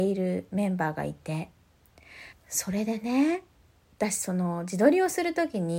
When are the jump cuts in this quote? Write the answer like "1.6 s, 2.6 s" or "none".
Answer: 2.3 s